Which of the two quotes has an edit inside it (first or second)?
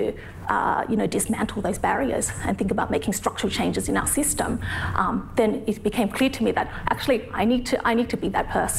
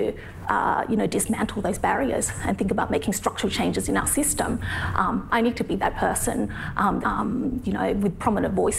second